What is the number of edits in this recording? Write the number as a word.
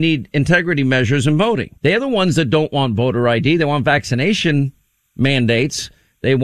one